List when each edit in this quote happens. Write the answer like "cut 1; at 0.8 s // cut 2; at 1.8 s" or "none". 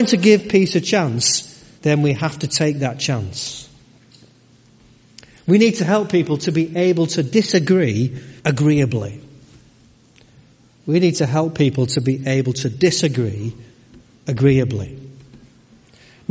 cut 1; at 1.8 s // cut 2; at 8.4 s